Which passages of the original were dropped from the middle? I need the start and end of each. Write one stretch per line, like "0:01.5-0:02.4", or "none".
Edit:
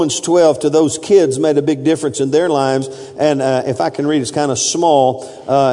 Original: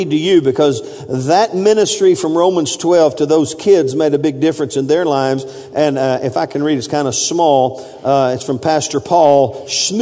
none